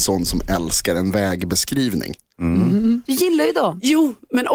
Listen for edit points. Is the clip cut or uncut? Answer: cut